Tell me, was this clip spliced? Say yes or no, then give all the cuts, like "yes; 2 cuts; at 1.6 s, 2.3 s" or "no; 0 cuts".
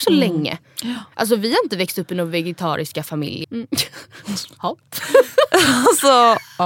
yes; 1 cut; at 3.4 s